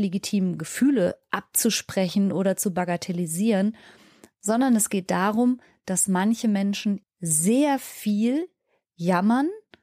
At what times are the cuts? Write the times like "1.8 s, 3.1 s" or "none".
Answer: 7.0 s

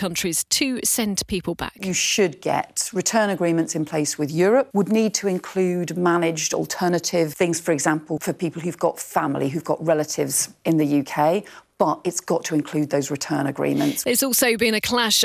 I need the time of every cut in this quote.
4.7 s

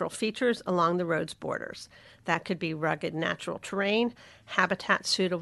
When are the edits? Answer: none

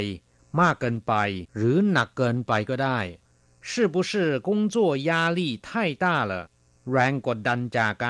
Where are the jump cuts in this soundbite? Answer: 1.5 s

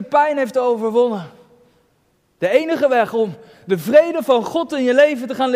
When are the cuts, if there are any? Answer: 2.4 s

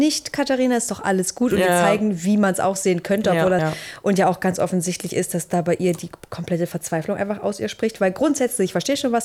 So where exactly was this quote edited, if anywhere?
3.6 s

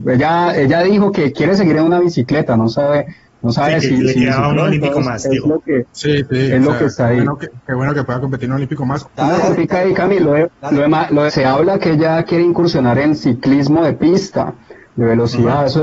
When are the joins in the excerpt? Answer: 9.0 s, 11.3 s

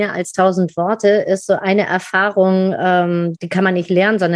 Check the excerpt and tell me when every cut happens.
3.3 s

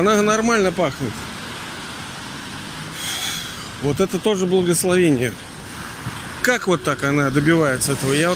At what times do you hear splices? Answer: 6.4 s

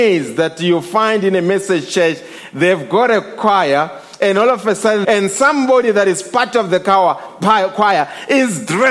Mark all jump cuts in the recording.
5.0 s

